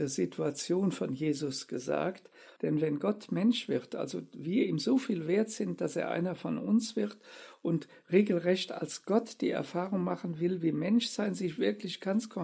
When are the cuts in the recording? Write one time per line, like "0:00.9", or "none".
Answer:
0:02.6